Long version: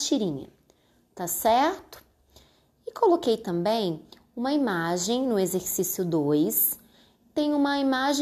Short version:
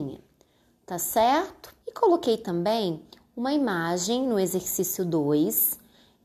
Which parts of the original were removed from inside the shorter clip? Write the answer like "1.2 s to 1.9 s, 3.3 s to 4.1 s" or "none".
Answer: 2.1 s to 2.8 s